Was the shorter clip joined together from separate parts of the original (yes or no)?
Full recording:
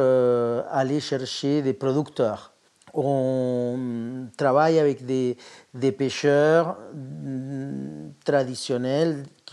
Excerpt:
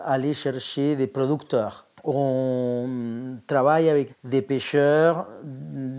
yes